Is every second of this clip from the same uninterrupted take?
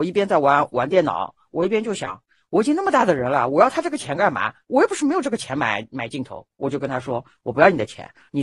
yes; 0 cuts

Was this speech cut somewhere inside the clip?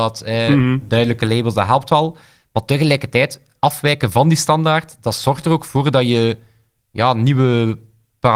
no; 0 cuts

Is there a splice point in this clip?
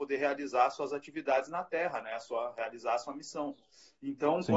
no; 0 cuts

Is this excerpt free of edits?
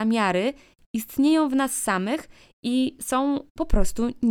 yes; 0 cuts

